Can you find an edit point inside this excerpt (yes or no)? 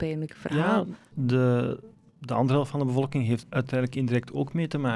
yes